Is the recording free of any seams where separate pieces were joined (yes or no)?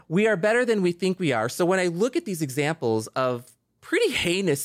yes